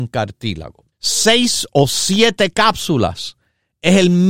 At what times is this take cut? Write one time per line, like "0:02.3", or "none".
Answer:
0:00.9

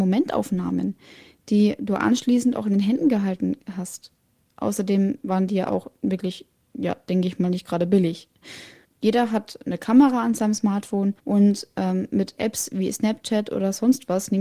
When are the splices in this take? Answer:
0:08.8
0:11.2

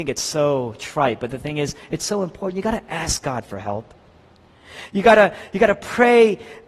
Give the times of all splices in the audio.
none

